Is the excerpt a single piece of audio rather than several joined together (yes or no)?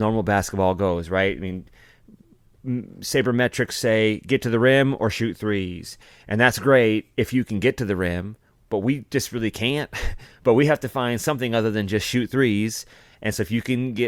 yes